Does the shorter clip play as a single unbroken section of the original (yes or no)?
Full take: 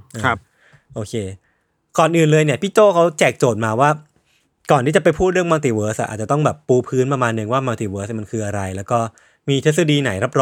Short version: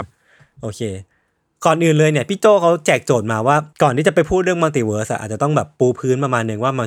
no